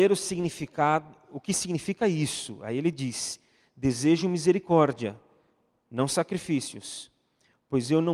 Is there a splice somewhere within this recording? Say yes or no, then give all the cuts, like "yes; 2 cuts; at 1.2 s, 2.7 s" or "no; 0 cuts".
no; 0 cuts